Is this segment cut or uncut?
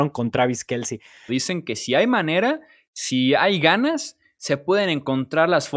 cut